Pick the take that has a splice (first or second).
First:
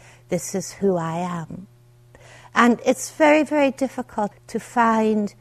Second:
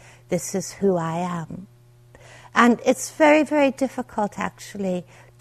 first